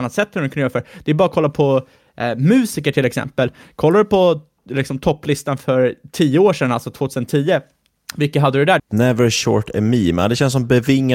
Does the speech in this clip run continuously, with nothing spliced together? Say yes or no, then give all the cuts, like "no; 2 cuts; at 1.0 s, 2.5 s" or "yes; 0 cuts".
no; 1 cut; at 8.8 s